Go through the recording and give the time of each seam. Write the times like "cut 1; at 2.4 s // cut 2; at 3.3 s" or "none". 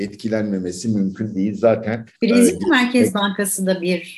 cut 1; at 2.1 s